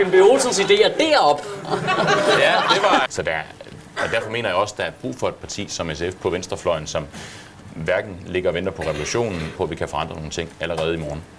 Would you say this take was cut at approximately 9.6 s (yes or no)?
yes